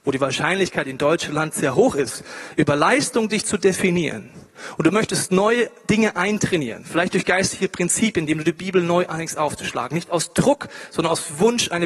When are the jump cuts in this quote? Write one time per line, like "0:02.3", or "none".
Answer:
0:01.5